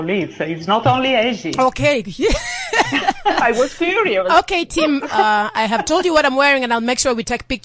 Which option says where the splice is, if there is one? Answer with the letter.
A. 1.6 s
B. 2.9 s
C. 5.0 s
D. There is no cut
C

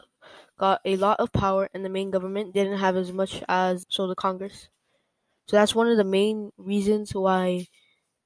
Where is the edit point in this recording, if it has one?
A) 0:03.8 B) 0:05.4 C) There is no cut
A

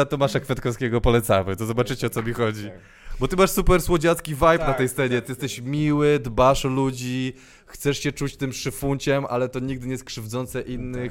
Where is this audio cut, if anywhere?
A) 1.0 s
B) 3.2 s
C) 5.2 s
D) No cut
D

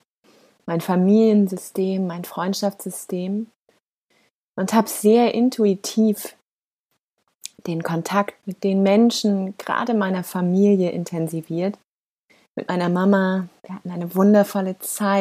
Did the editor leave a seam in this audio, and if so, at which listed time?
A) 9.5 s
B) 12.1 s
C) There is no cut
C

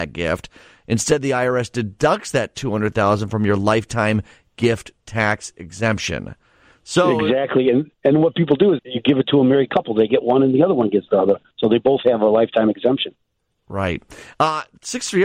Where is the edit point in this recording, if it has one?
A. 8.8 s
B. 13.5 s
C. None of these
A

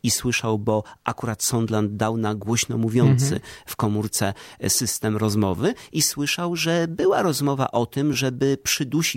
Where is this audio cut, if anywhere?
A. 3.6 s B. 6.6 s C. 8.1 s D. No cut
D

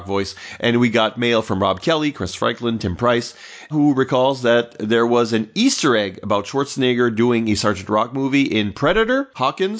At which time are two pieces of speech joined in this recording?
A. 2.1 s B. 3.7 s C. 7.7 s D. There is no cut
B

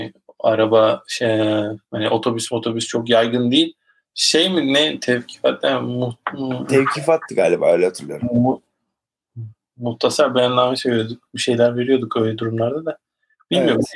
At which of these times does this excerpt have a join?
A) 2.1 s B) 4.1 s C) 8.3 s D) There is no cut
B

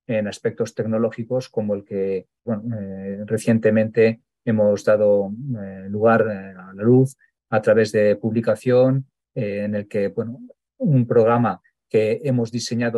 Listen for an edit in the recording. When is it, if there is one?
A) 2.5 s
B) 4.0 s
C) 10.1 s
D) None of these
A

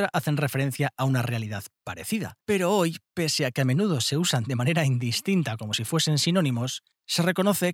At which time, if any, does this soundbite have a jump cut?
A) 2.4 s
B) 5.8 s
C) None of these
A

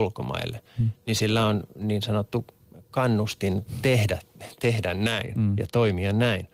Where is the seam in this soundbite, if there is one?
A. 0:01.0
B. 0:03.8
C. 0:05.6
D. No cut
D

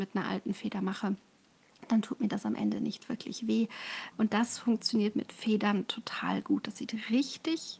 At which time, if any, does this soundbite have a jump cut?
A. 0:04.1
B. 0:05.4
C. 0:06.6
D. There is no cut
A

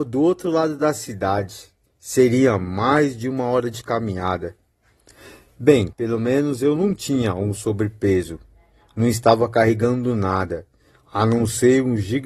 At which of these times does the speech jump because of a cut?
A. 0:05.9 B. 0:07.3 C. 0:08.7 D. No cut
A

